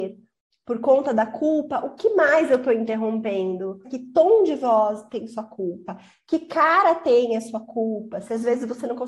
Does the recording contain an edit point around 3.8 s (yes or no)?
yes